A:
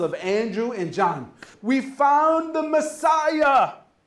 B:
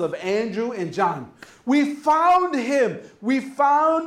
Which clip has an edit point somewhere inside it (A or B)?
A